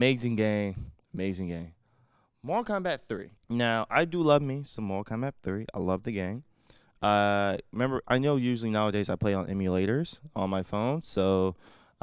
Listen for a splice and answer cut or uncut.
cut